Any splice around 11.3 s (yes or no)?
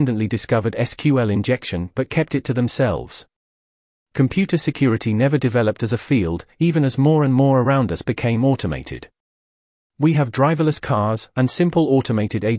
yes